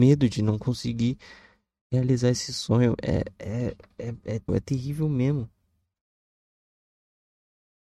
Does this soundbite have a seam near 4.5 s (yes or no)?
yes